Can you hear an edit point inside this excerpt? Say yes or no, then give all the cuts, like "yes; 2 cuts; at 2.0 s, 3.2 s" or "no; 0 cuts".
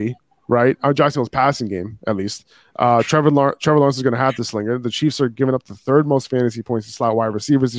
no; 0 cuts